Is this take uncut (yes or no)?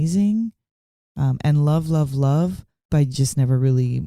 no